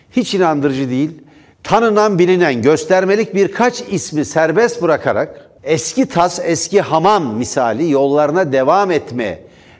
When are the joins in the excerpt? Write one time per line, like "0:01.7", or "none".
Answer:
0:01.5
0:05.6